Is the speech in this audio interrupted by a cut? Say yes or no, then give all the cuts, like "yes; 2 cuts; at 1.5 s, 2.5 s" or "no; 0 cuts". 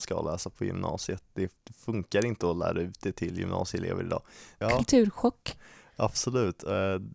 yes; 1 cut; at 4.6 s